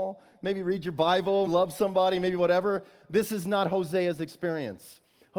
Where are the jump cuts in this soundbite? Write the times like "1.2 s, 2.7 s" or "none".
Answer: 1.5 s